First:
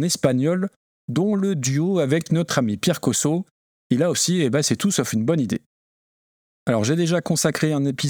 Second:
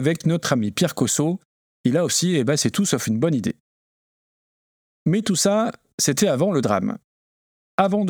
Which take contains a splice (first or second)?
first